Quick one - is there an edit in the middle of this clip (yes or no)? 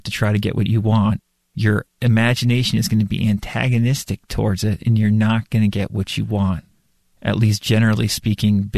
no